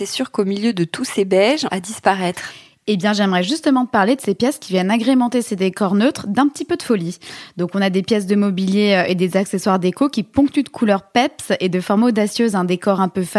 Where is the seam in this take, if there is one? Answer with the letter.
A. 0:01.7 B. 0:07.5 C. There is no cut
A